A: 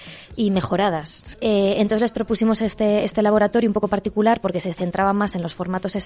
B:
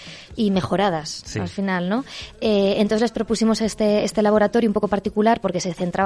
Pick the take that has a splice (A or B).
A